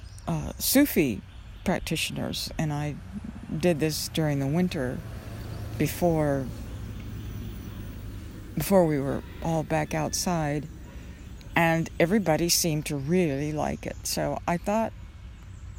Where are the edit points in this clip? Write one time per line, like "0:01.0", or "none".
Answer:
none

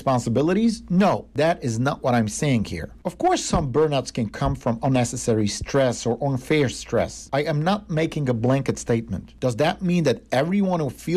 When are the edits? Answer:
0:07.3

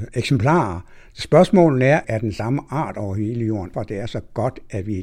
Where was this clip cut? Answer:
0:02.0
0:03.7

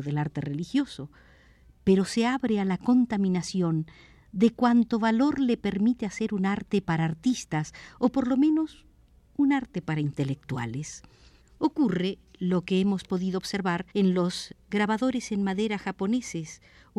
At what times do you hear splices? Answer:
0:11.4
0:13.9

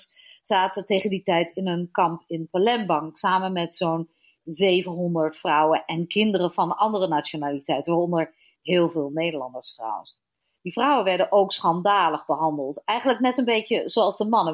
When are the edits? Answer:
none

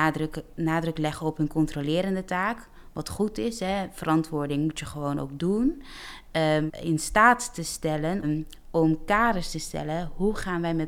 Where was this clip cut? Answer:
0:06.7
0:08.2

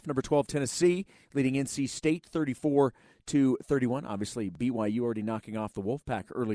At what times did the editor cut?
none

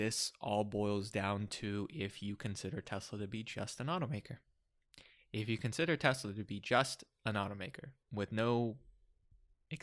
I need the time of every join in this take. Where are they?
0:08.0

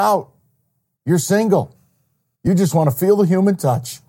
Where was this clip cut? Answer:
none

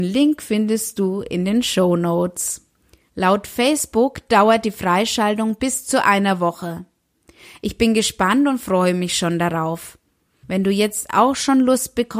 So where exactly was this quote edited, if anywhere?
0:03.1
0:10.4

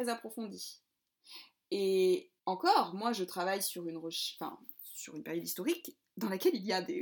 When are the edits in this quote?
0:02.4

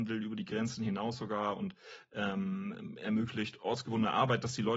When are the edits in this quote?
none

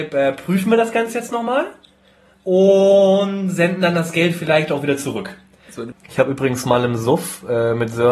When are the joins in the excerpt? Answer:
0:05.9

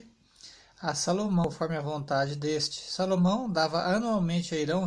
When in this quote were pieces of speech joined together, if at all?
none

